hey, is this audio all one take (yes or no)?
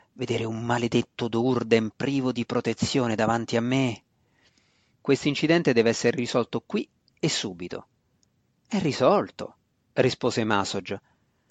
no